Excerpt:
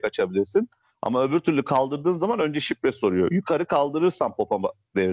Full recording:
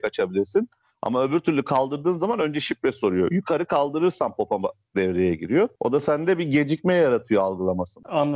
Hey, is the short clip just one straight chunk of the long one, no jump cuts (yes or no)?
yes